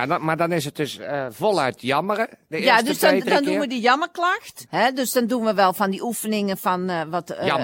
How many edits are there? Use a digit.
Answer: 1